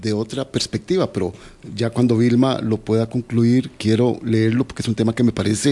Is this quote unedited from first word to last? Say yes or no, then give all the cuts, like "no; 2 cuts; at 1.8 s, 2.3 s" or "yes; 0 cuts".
yes; 0 cuts